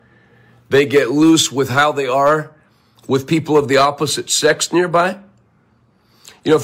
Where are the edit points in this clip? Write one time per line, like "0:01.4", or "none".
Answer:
none

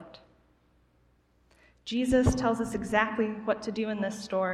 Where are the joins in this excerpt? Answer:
none

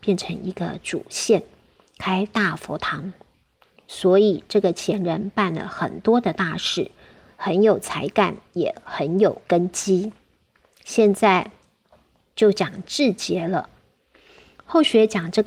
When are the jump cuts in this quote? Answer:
none

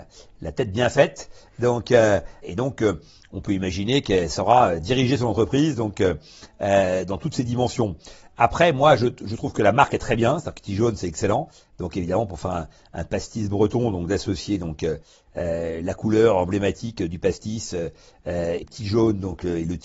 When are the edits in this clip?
0:18.6

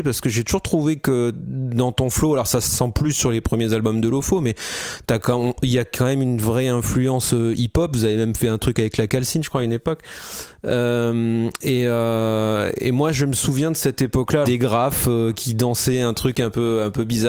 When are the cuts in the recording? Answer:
0:14.4

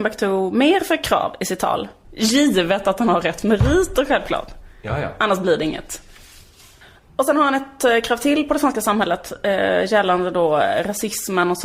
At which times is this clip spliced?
0:02.0

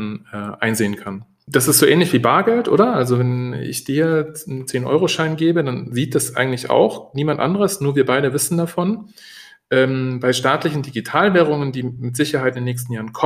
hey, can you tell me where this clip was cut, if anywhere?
none

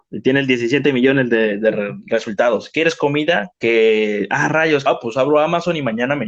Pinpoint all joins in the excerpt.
0:03.5
0:04.9

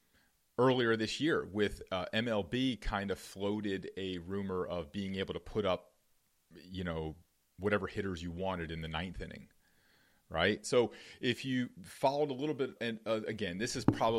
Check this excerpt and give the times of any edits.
0:10.6
0:12.8

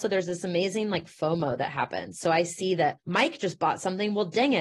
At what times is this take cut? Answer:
0:03.0

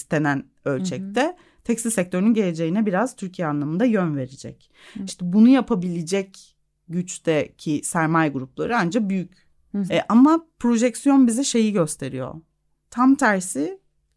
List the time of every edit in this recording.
0:05.1
0:09.9
0:12.7

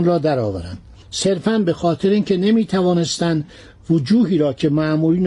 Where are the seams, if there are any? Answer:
none

